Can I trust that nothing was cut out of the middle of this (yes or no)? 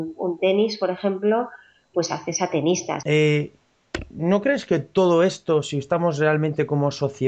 no